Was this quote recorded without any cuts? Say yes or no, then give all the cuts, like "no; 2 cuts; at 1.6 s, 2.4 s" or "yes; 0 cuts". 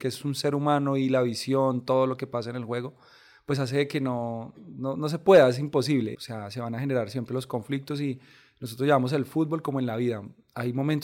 no; 1 cut; at 6.1 s